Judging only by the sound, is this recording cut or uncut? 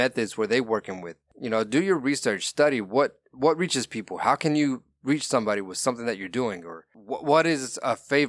uncut